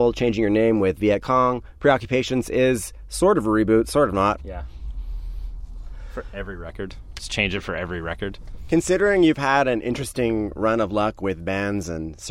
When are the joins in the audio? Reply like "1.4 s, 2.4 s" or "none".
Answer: 4.4 s